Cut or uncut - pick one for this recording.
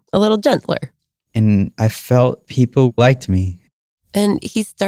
uncut